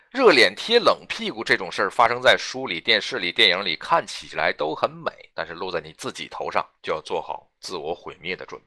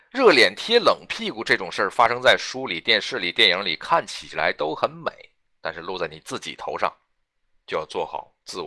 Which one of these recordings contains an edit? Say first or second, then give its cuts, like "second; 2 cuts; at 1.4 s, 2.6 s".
first; 2 cuts; at 5.3 s, 6.8 s